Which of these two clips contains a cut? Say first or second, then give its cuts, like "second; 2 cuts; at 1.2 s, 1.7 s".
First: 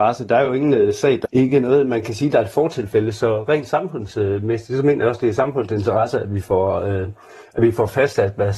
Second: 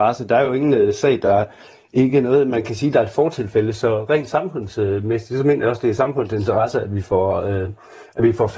first; 1 cut; at 1.2 s